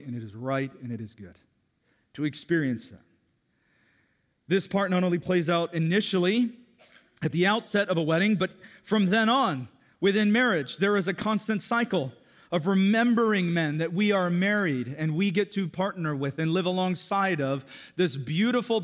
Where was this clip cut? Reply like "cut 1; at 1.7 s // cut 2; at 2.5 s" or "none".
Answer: none